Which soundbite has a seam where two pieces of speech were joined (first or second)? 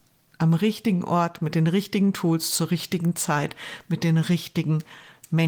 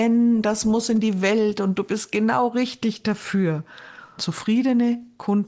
second